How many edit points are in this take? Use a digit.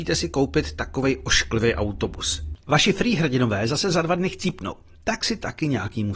1